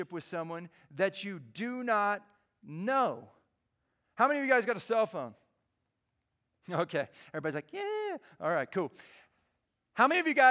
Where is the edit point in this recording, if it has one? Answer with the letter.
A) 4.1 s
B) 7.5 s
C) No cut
C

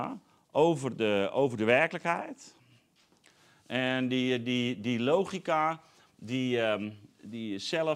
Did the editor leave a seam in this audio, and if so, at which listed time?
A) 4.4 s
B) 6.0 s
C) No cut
C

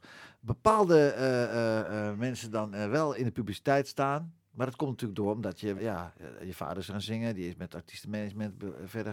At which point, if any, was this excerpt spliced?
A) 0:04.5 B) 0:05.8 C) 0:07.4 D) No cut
B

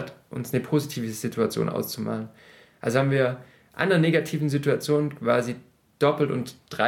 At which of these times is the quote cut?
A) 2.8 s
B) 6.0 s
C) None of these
C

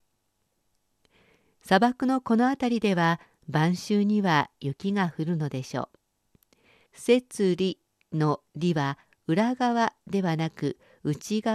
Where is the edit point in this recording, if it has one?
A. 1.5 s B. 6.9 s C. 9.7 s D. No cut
B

